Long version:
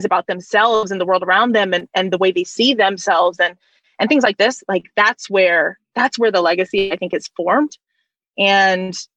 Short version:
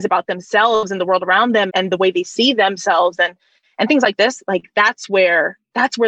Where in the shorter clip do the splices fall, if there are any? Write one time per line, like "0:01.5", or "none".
0:01.7